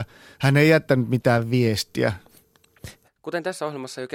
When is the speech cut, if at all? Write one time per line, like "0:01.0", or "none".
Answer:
0:03.0